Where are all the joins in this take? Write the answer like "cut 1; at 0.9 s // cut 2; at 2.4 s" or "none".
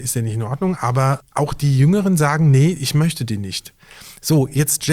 cut 1; at 1.2 s